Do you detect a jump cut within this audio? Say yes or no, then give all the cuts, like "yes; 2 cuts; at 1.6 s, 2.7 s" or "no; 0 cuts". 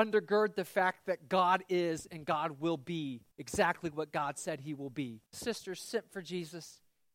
yes; 2 cuts; at 3.3 s, 5.3 s